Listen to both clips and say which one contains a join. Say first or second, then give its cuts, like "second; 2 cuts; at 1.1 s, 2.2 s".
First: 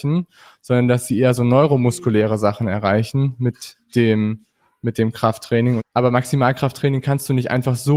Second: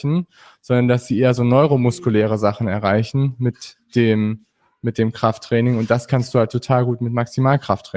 first; 1 cut; at 5.8 s